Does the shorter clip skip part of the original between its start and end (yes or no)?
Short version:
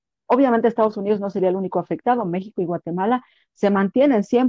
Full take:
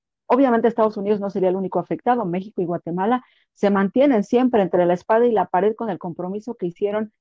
no